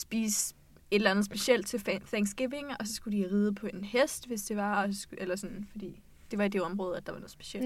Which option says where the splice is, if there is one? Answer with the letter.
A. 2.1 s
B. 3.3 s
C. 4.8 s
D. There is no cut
D